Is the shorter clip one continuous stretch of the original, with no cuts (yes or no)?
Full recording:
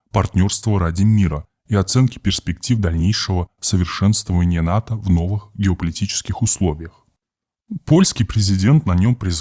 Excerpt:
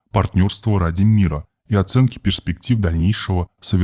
yes